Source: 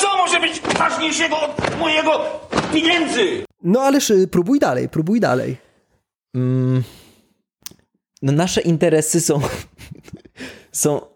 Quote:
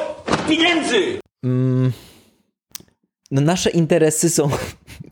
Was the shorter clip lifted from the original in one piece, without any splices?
no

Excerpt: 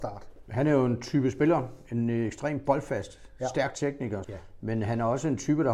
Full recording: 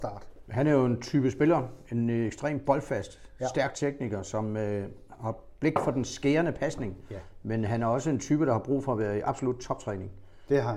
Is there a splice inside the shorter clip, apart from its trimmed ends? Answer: yes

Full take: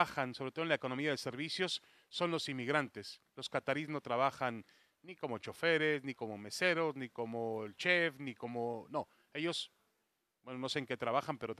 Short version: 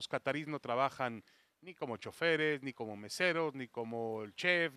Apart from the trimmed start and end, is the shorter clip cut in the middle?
no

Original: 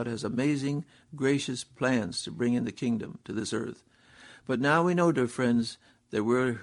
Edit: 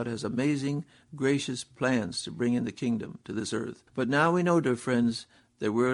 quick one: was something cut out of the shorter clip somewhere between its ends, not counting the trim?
yes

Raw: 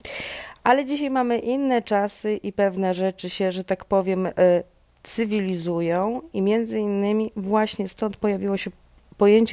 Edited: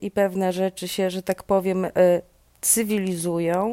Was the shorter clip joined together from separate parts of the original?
no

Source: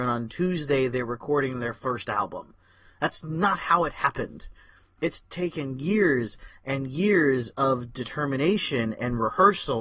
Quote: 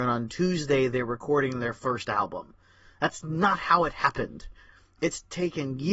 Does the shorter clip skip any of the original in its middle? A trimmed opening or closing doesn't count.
no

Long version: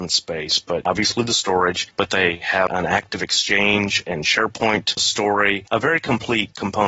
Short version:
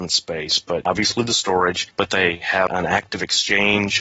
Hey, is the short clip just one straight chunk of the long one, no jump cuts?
yes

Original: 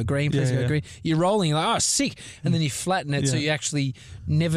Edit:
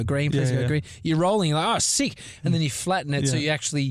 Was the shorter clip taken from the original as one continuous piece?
yes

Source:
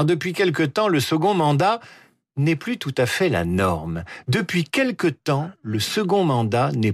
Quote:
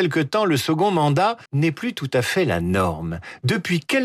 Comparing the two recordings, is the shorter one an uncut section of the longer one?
no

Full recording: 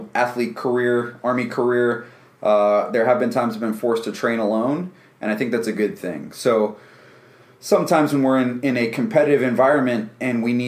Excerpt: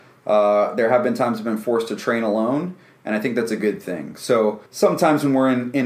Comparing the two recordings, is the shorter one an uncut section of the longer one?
no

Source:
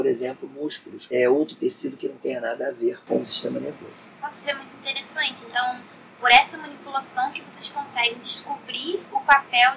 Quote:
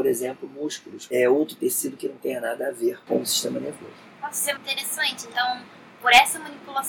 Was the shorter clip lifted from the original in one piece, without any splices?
no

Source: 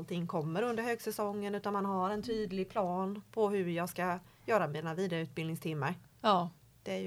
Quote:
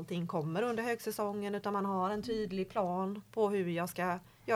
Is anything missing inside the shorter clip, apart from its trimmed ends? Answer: no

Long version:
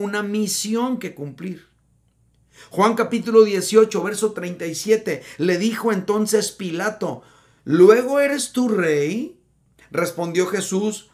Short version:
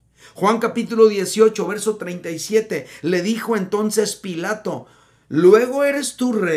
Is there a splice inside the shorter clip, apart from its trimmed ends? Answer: no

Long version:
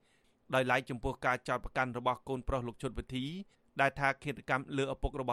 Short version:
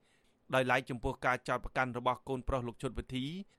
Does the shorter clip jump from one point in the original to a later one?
no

